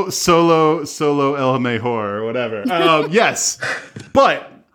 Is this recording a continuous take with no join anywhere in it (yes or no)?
yes